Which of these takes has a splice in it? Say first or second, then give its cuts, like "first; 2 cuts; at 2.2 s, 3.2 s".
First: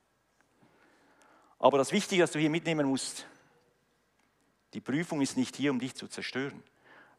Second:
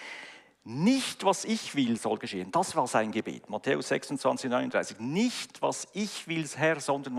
second; 1 cut; at 2.0 s